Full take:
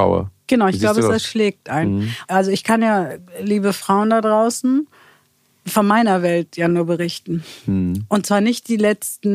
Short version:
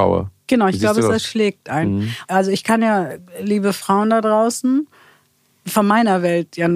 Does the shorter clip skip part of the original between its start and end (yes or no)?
no